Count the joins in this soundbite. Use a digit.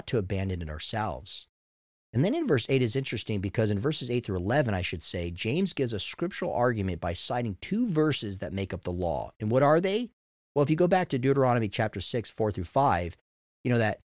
0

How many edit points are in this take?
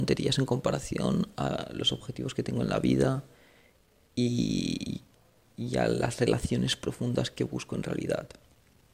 0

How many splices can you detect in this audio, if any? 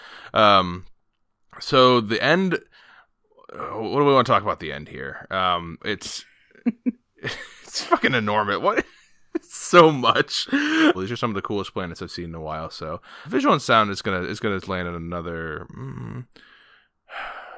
3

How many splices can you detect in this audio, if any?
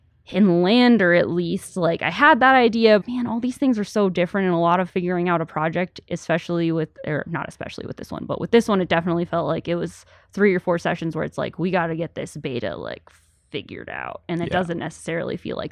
1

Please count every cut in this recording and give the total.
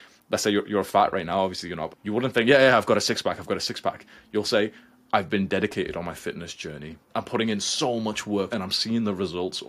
2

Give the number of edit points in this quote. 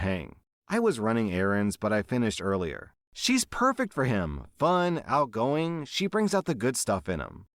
1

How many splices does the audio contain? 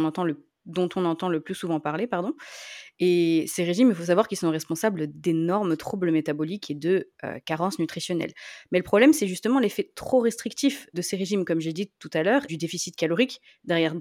3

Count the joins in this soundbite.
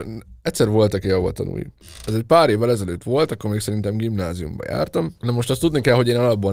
0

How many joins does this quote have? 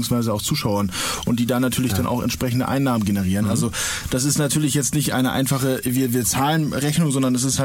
0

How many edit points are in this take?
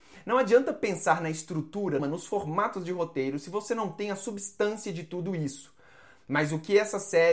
1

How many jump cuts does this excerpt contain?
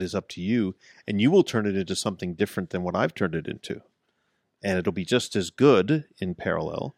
0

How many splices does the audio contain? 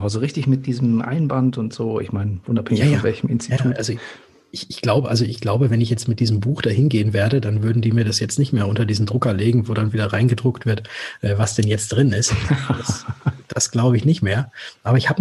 0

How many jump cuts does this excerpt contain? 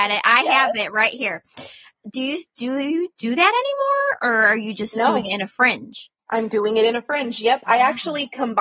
1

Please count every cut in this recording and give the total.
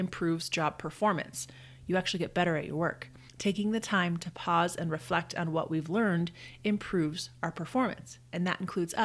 1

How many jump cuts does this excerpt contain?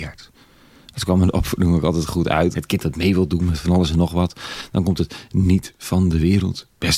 1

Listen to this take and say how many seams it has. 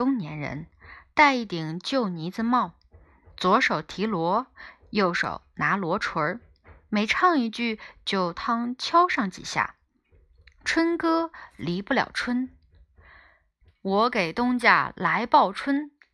2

